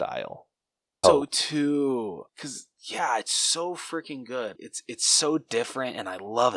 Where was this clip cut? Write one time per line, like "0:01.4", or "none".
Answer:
0:01.0
0:02.3
0:04.6